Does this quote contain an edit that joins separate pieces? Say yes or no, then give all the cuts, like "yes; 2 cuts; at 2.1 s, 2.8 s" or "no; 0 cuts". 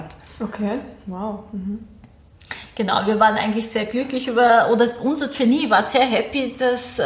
no; 0 cuts